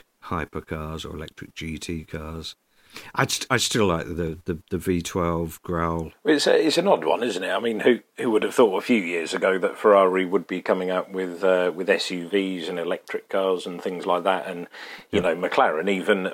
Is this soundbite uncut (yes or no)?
yes